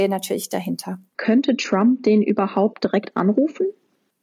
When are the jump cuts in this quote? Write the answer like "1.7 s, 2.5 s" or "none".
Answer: 1.1 s